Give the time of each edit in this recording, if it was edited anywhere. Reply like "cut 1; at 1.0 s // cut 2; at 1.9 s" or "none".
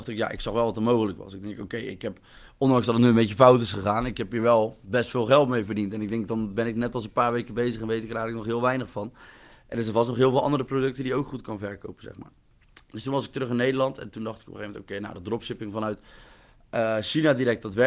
none